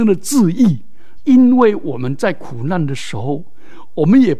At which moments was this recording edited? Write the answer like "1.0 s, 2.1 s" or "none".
1.2 s